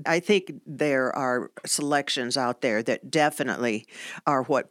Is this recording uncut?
yes; 0 cuts

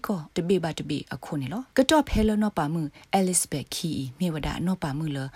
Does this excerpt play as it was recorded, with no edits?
no; 1 cut; at 1.7 s

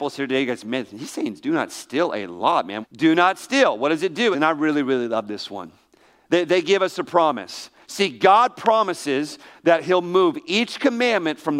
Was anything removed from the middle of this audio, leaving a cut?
yes; 2 cuts; at 2.8 s, 4.3 s

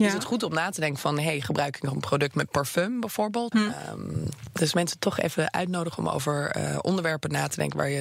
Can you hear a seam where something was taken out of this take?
yes; 1 cut; at 3.5 s

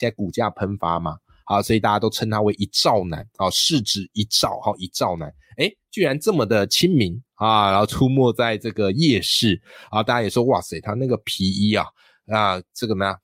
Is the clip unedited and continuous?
yes; 0 cuts

